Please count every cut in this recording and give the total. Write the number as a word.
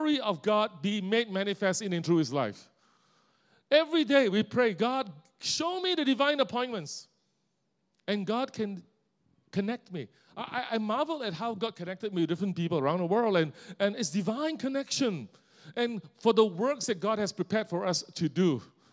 zero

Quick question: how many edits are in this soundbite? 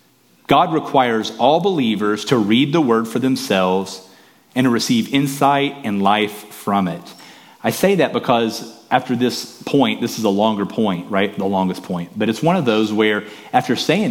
zero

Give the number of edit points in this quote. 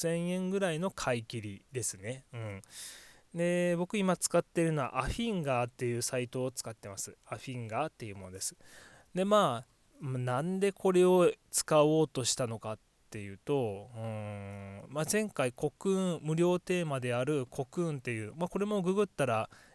one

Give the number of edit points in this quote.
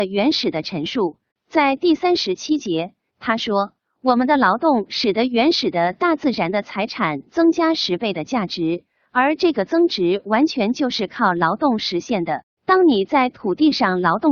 two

